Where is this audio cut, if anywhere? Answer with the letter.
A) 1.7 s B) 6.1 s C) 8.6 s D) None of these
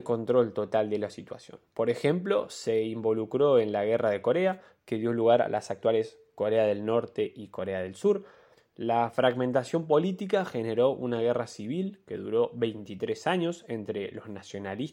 C